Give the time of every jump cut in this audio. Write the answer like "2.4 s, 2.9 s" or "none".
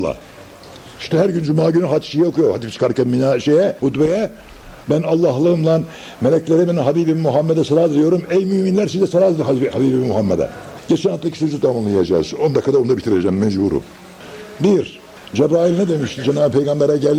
4.8 s